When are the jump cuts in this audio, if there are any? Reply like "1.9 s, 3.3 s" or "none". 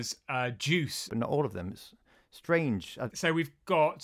1.1 s, 3.1 s